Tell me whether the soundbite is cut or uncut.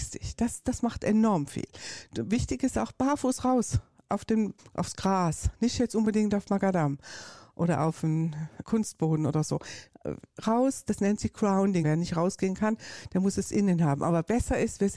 cut